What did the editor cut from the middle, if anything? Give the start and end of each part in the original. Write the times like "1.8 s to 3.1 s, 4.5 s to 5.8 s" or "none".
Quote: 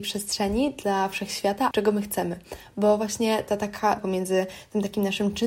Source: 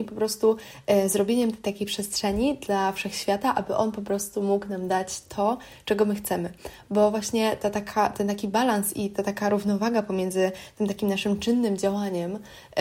3.5 s to 5.8 s, 8.1 s to 10.0 s

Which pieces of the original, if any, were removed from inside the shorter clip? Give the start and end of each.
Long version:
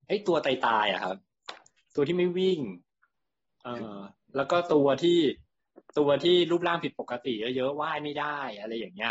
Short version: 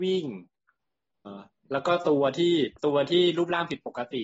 3.6 s to 3.9 s, 5.4 s to 5.9 s

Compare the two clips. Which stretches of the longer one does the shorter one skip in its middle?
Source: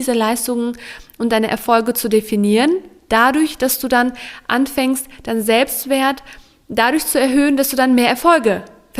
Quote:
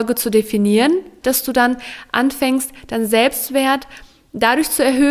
3.0 s to 3.6 s

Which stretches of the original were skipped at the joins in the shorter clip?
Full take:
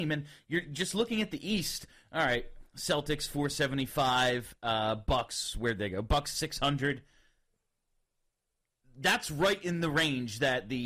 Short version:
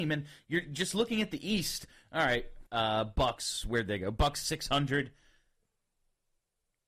2.7 s to 4.6 s

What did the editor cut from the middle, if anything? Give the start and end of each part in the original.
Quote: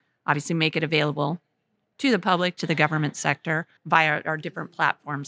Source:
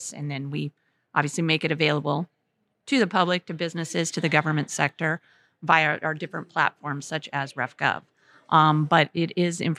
3.5 s to 4.1 s, 5.3 s to 5.5 s

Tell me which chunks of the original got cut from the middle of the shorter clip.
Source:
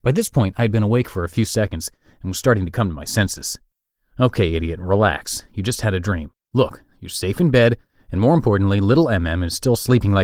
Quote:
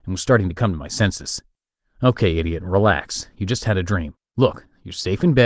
none

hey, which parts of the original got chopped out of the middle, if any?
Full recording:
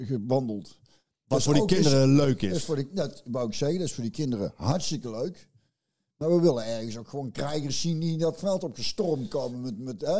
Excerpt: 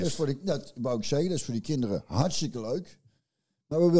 none

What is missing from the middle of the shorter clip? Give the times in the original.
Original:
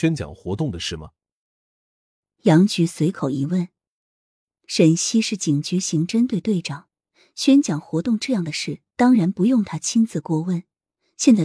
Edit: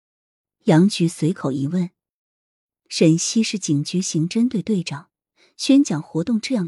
none

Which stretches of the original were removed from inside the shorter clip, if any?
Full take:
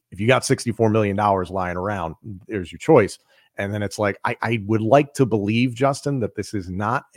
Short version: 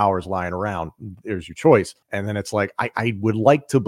3.3 s to 3.5 s

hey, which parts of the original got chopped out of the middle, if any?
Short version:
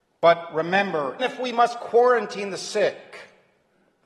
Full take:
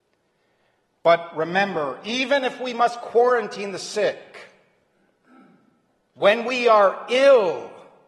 2.0 s to 2.4 s

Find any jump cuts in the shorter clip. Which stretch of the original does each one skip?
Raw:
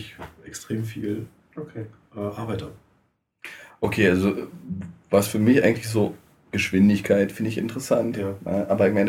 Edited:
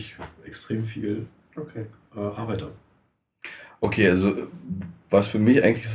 none

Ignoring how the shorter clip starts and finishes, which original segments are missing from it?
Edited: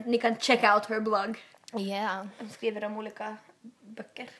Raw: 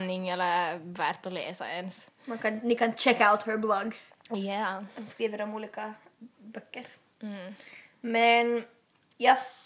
none

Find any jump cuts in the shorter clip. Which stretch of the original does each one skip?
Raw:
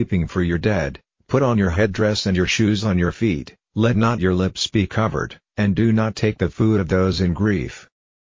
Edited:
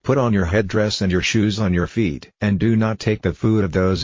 3.6 s to 5.5 s

